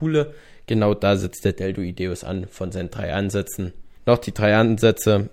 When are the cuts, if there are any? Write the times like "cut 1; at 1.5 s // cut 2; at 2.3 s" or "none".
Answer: cut 1; at 4.0 s

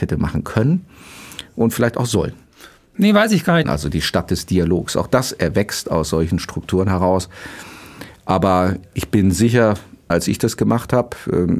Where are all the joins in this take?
cut 1; at 3.6 s // cut 2; at 10.1 s

